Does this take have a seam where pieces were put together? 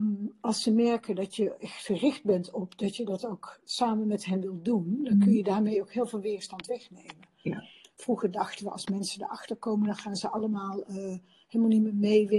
no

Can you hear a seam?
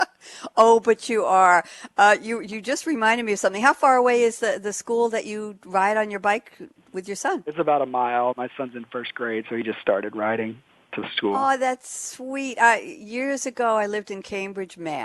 no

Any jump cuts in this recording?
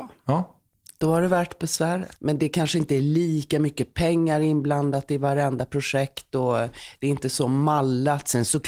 yes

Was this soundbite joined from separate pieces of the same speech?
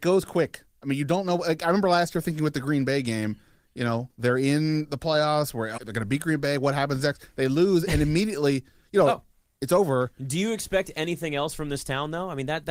yes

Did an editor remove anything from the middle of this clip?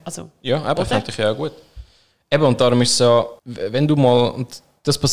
yes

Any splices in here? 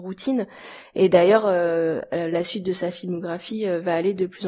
no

